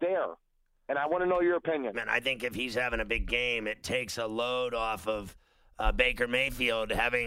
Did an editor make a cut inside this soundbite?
yes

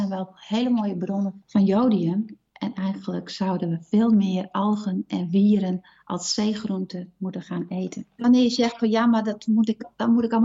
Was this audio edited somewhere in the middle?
yes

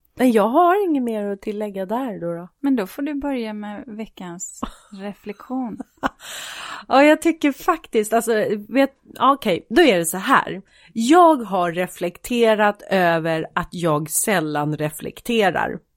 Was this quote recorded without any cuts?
yes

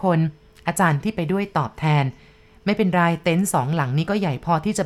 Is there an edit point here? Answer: no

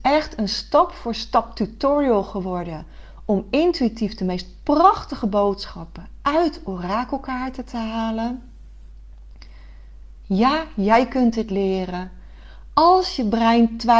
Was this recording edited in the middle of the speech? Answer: no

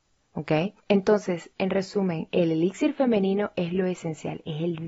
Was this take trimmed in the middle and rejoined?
no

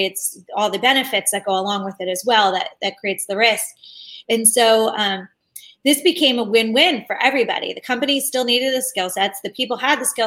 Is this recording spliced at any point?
no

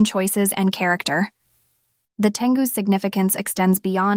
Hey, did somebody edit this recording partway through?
no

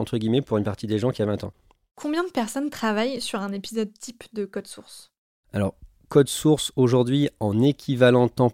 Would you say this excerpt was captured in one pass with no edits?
yes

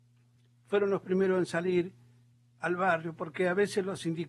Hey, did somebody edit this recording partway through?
no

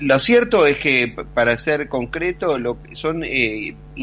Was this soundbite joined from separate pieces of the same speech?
yes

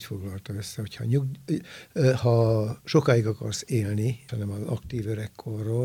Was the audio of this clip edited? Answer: yes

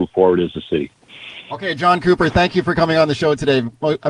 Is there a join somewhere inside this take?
no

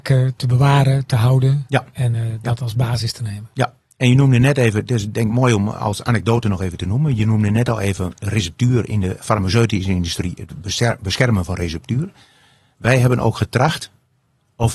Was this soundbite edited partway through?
no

